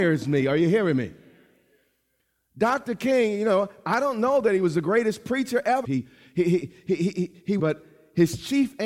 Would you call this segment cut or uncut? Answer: cut